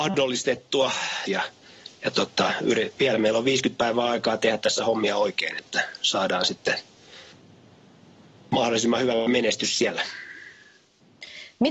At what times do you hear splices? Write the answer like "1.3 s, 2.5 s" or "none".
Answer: 1.3 s